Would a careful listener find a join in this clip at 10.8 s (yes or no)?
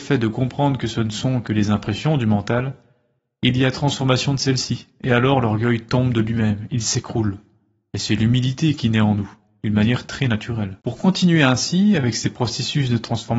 yes